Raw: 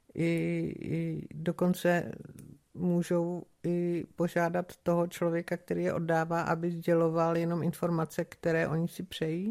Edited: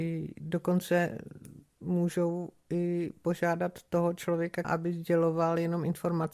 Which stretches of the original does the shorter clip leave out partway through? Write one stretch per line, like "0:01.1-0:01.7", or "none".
0:05.6-0:06.4